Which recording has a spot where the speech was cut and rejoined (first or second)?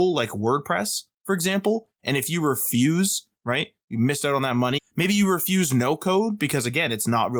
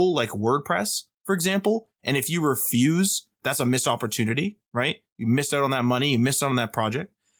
first